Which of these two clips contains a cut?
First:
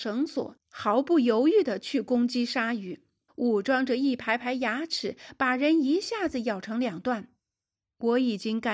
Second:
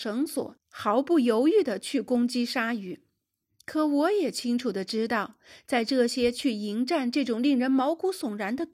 first; 1 cut; at 3.3 s

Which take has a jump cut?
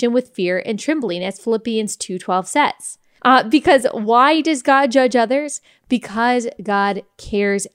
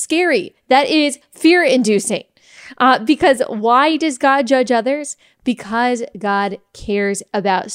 first; 1 cut; at 3.2 s

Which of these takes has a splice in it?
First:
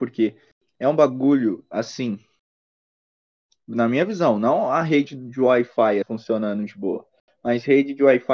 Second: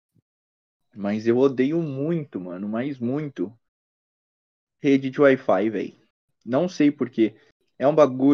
first; 1 cut; at 6.0 s

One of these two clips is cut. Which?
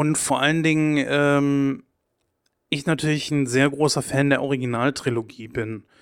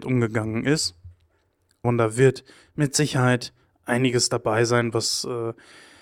second; 1 cut; at 1.8 s

